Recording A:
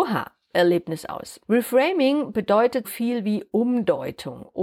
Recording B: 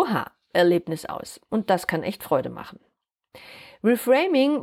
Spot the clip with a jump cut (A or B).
A